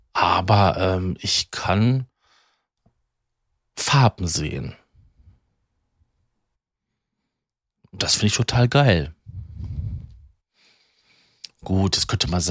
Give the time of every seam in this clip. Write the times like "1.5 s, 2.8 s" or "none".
none